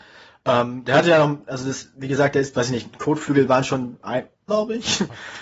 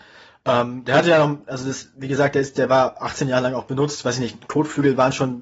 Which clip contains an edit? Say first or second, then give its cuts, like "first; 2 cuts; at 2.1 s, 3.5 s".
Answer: first; 2 cuts; at 2.5 s, 4.5 s